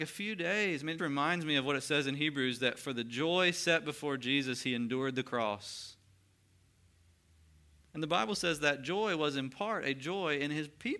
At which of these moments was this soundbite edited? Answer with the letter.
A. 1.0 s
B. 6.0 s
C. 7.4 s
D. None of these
A